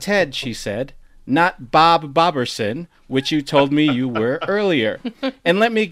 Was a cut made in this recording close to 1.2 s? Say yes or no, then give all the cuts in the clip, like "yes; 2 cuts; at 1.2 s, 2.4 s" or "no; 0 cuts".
no; 0 cuts